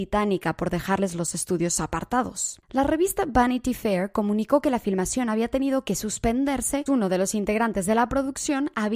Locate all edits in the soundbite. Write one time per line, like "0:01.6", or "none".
0:02.6
0:06.9